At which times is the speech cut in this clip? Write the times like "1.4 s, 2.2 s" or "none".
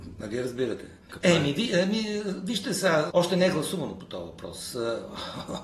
1.1 s, 3.1 s